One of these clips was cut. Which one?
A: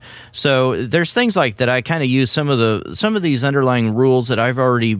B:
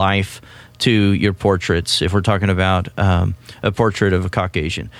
A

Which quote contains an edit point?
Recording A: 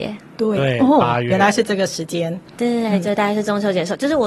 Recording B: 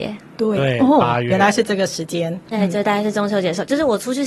B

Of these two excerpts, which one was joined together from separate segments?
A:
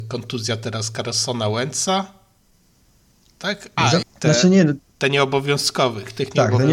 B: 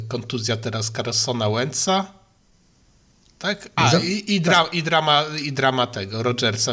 A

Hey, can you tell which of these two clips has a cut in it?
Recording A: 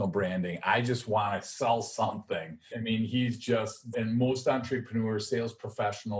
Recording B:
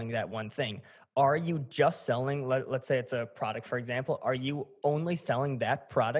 A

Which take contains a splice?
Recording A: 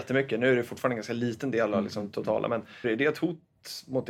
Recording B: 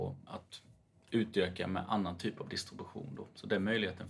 A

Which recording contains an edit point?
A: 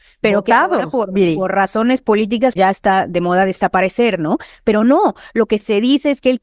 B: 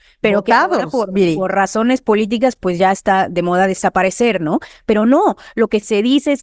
A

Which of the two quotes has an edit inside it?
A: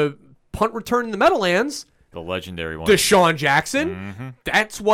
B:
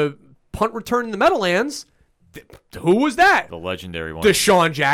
A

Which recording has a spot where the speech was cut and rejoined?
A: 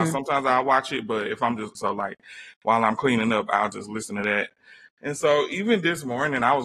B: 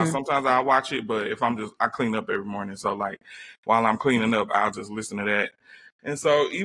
A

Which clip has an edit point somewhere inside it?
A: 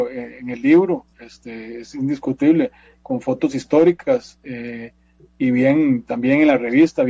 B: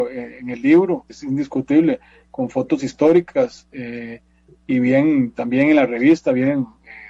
B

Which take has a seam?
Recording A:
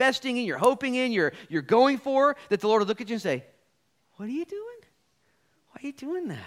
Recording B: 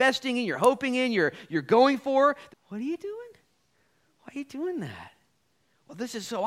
B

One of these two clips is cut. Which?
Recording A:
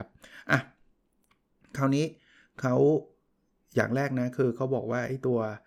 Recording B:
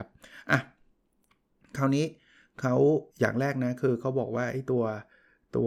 B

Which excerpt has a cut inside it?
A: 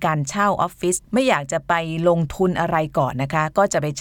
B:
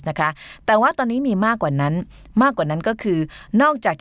A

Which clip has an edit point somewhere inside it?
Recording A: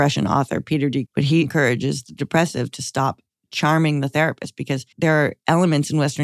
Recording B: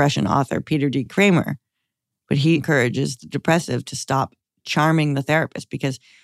A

